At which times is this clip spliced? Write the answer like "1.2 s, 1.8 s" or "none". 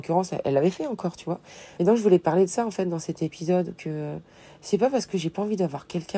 1.8 s